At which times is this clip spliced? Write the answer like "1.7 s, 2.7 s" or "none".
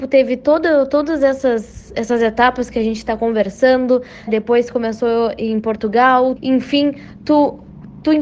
4.3 s, 6.4 s